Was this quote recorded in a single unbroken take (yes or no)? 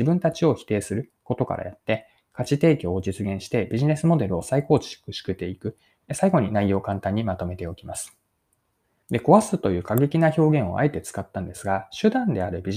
no